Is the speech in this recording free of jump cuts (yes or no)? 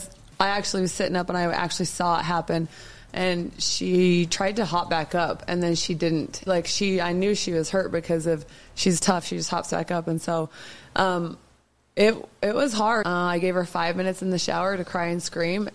no